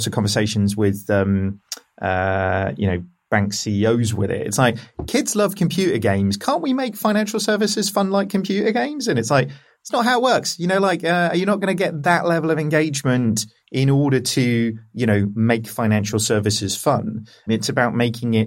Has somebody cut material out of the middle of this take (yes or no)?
yes